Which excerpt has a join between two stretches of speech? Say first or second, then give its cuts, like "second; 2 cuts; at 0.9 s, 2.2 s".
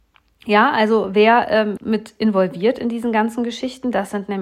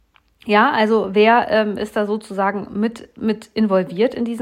first; 1 cut; at 1.8 s